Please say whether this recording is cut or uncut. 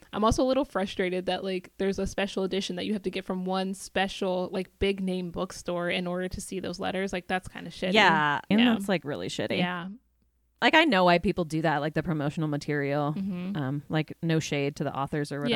cut